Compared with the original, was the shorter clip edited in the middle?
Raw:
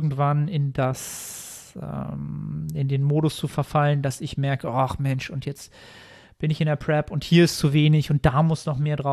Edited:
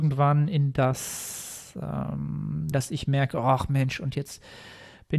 yes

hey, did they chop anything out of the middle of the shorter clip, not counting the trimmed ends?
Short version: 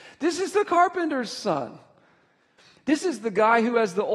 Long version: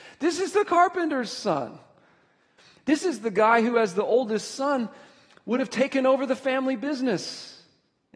no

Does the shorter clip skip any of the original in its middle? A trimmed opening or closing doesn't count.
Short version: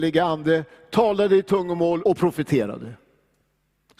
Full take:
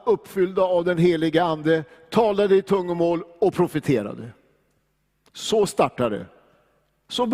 yes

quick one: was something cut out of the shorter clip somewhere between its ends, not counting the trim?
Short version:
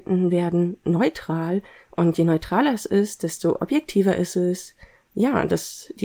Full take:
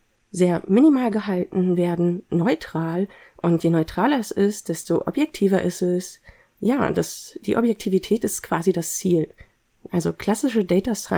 no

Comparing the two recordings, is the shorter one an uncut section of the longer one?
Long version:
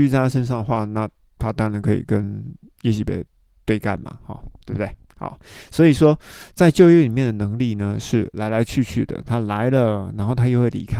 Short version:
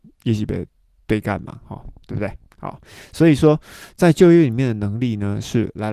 yes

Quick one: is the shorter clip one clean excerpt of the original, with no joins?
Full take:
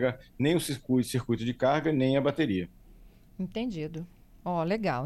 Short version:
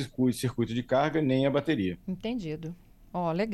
no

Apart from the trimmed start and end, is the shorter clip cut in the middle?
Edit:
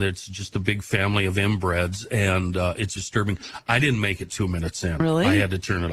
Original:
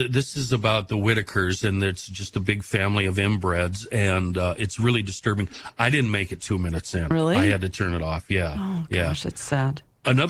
yes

